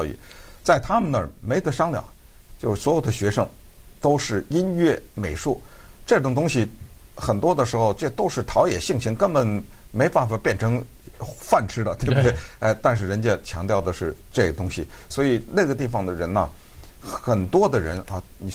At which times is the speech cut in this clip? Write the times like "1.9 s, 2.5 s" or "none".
15.1 s